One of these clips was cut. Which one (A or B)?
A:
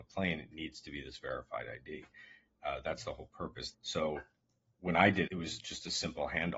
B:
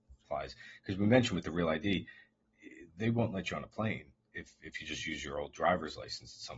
A